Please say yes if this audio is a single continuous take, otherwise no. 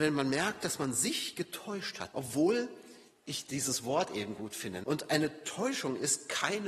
no